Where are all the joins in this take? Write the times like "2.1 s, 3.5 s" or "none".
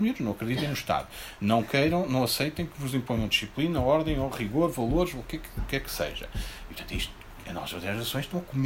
none